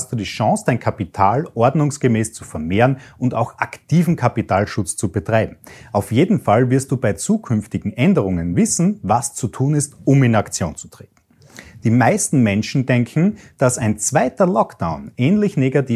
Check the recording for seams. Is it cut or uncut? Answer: uncut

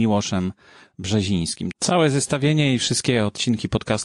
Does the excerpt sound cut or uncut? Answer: cut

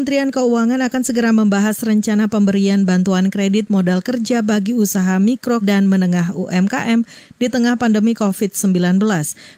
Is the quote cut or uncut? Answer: cut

